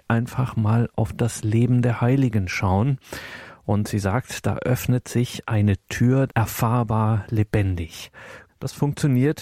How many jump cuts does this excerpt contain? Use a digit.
2